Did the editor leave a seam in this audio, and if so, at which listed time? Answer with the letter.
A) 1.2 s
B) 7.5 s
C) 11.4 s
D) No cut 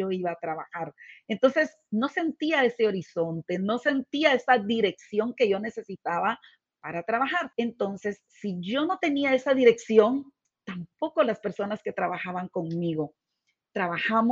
B